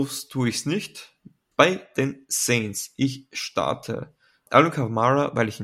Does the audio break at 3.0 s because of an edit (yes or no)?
no